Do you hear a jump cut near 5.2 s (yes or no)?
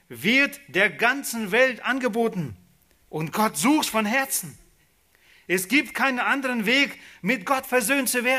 no